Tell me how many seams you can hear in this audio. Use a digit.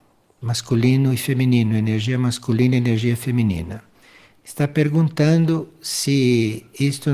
0